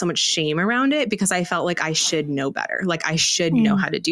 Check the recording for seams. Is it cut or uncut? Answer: uncut